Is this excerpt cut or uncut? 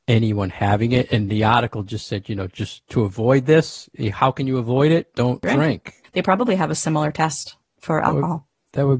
cut